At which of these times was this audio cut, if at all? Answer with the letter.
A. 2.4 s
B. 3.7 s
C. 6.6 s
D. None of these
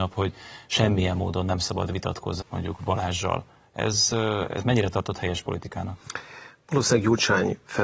A